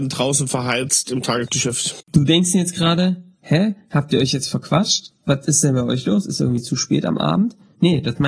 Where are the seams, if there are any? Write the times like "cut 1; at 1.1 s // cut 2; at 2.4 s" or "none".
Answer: none